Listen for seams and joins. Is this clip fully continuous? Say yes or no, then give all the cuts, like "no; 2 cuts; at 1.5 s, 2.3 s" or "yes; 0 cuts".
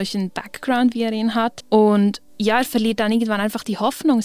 no; 1 cut; at 1.6 s